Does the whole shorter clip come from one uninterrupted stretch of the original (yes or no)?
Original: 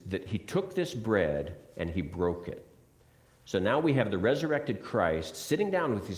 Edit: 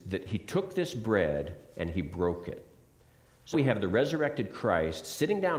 no